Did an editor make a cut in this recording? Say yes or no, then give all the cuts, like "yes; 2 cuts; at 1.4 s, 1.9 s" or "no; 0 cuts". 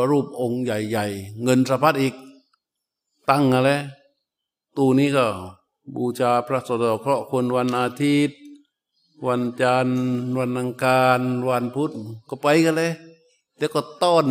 no; 0 cuts